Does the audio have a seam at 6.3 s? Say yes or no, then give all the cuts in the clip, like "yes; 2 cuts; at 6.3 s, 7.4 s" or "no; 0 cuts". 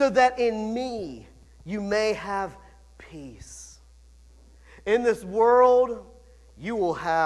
no; 0 cuts